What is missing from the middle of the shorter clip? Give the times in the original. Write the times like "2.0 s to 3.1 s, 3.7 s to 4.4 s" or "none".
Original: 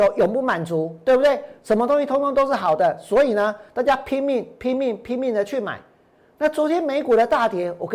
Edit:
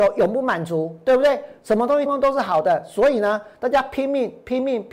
2.1 s to 2.2 s